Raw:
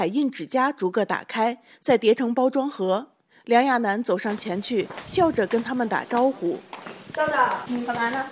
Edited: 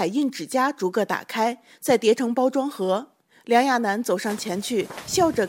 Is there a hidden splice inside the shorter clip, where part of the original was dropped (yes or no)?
no